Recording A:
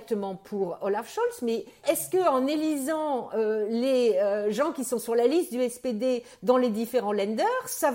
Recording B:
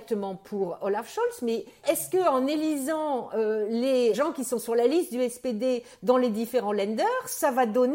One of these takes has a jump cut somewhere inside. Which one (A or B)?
B